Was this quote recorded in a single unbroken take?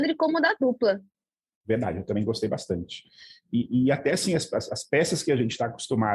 yes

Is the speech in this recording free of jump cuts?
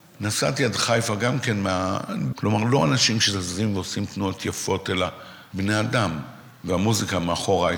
no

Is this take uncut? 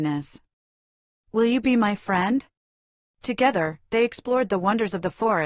no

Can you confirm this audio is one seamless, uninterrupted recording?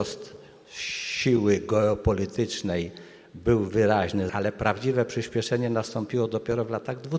no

